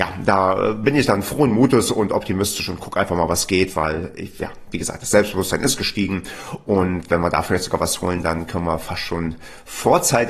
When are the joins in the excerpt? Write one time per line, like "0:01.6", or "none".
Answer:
none